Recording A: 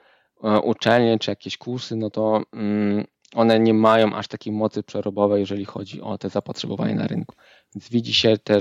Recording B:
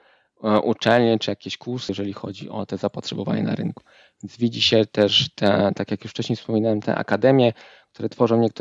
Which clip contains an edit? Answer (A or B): B